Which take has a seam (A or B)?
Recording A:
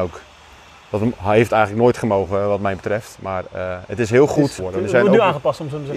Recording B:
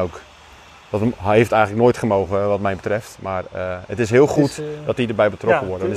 A